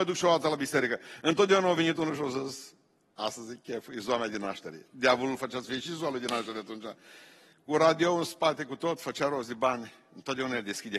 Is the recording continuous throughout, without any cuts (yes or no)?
yes